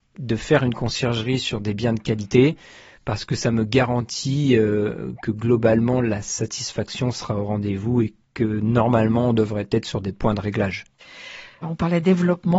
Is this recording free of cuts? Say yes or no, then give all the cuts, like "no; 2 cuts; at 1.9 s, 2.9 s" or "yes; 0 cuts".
yes; 0 cuts